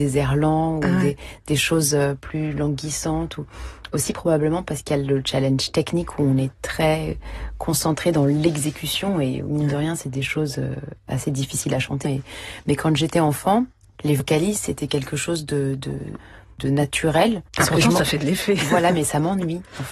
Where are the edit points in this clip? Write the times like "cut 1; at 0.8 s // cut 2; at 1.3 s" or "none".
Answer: cut 1; at 12.0 s // cut 2; at 13.9 s // cut 3; at 17.5 s